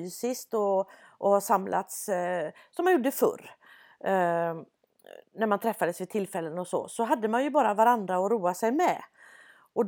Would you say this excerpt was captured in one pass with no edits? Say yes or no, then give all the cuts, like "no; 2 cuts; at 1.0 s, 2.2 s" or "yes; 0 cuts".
yes; 0 cuts